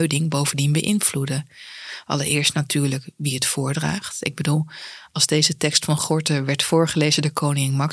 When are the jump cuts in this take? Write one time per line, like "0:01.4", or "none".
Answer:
none